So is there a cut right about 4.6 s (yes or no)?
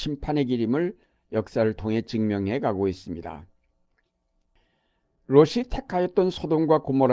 no